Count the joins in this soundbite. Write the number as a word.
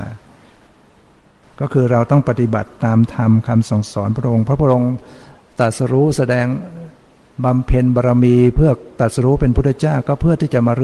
zero